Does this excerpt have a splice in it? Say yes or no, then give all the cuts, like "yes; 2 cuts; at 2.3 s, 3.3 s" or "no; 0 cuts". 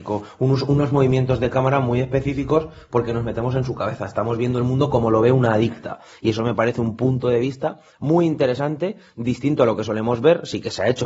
no; 0 cuts